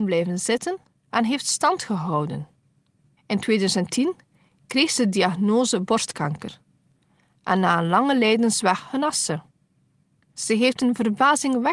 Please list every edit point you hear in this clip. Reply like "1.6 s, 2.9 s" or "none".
3.2 s, 10.3 s